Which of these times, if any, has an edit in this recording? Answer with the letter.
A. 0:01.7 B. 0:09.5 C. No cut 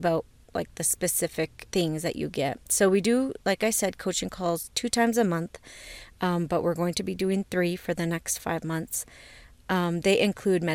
A